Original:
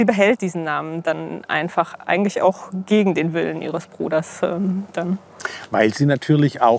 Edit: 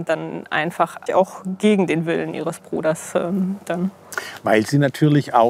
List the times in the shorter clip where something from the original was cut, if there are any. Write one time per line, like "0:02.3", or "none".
0:01.1